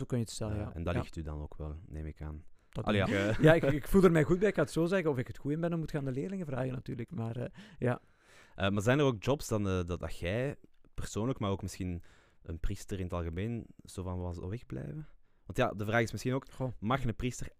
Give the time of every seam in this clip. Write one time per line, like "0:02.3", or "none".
0:03.1